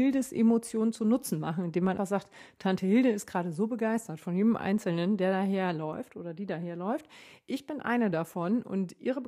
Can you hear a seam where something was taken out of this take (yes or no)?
yes